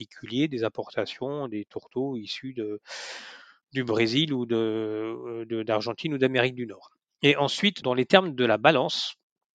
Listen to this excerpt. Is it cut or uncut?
cut